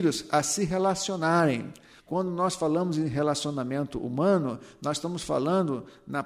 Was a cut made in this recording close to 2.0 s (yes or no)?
yes